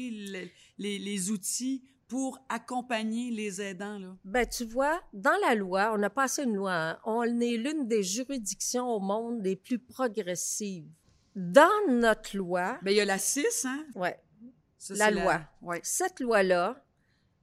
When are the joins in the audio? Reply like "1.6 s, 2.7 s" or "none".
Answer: 13.9 s